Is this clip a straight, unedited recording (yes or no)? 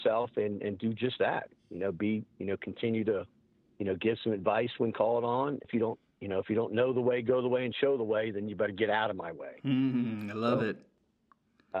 no